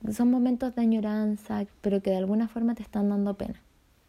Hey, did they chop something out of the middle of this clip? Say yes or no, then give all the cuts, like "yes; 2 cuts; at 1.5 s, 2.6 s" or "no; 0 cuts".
yes; 1 cut; at 1.7 s